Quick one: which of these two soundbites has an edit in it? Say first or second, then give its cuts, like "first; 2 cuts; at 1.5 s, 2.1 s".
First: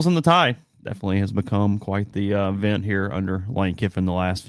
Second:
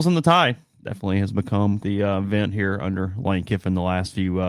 second; 1 cut; at 1.8 s